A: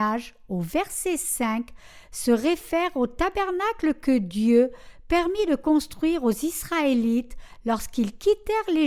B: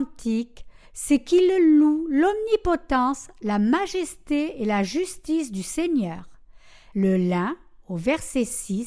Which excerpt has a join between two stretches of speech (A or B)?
B